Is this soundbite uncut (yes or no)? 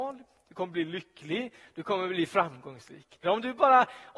no